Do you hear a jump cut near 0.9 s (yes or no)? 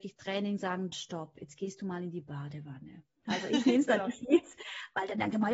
yes